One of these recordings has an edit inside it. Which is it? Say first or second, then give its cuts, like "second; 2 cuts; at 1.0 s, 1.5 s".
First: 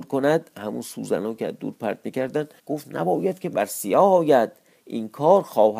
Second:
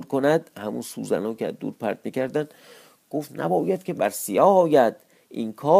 first; 1 cut; at 2.6 s